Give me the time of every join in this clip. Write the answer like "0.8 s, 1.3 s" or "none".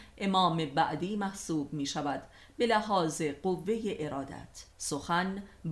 4.7 s